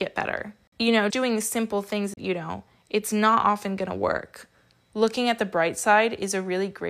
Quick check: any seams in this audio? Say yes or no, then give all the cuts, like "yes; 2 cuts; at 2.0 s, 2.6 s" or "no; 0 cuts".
yes; 3 cuts; at 1.1 s, 2.2 s, 4.9 s